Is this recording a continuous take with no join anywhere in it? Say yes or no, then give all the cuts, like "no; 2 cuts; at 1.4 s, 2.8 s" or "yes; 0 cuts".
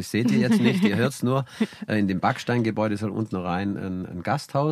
yes; 0 cuts